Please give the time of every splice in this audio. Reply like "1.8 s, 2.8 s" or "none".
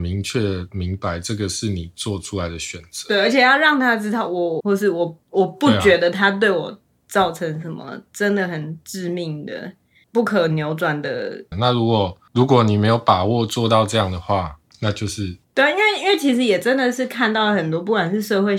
4.6 s, 11.5 s